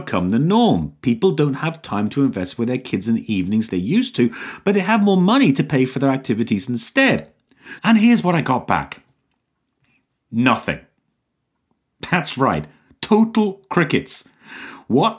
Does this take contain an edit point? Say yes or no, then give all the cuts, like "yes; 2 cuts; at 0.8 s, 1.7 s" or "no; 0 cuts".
yes; 2 cuts; at 3.7 s, 7.8 s